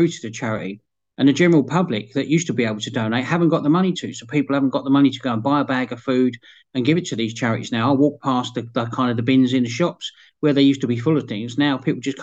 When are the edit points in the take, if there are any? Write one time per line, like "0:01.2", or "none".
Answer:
none